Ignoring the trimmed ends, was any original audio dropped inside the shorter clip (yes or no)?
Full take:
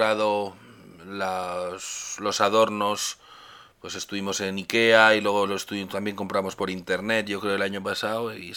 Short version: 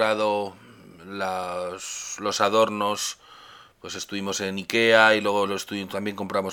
no